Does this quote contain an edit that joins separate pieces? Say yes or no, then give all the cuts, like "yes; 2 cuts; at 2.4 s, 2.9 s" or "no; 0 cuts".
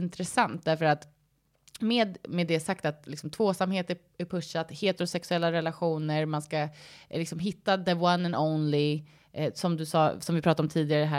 no; 0 cuts